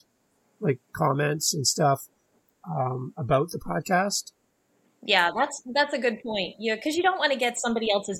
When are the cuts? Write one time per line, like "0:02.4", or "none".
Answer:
none